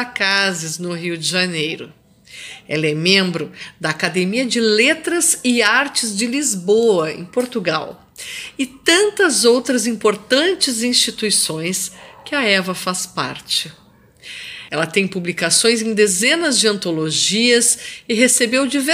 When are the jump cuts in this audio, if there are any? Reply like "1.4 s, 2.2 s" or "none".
14.7 s